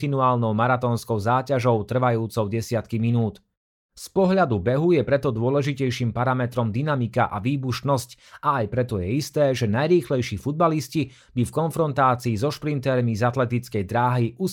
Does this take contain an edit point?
no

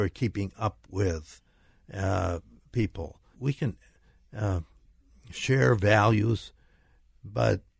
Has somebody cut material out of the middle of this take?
yes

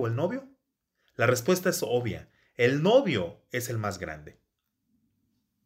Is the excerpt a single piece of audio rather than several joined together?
yes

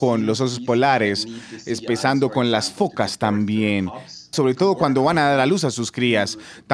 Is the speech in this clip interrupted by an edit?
yes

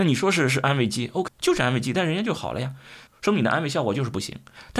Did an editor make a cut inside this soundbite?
yes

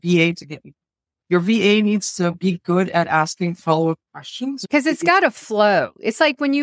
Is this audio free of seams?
yes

